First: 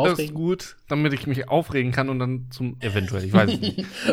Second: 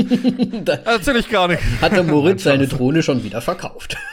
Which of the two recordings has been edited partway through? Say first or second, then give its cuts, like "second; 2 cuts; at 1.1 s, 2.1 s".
first; 1 cut; at 2.8 s